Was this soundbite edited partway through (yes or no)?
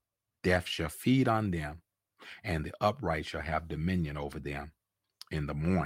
no